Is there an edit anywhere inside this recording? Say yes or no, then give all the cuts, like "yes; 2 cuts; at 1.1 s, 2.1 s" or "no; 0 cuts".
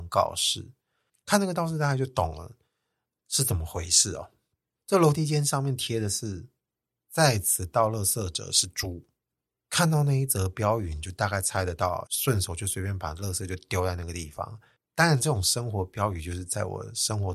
yes; 2 cuts; at 12.1 s, 14.8 s